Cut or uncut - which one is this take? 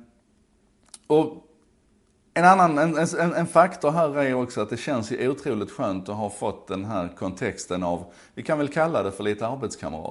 uncut